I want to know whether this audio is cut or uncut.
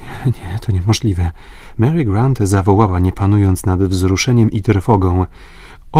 cut